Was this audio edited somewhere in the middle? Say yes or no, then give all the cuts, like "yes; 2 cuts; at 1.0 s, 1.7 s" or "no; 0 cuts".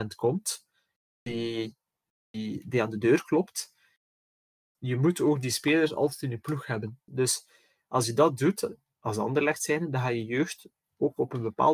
yes; 2 cuts; at 4.7 s, 7.1 s